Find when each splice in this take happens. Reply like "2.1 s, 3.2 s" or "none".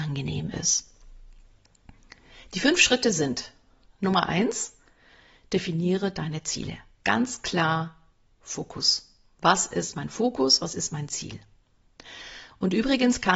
none